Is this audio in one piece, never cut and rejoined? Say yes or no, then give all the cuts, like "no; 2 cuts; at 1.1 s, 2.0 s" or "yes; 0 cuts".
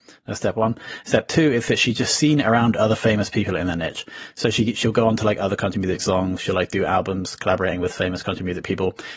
yes; 0 cuts